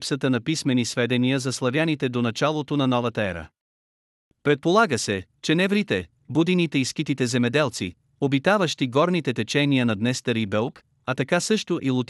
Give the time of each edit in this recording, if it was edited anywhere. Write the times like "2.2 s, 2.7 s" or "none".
none